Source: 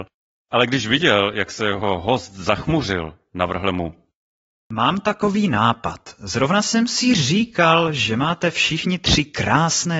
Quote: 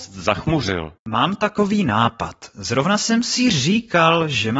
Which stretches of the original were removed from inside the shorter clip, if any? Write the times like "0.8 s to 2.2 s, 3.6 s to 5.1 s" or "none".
3.2 s to 4.6 s